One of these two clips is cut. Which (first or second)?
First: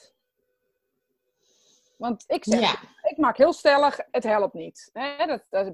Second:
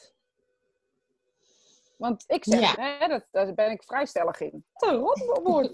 second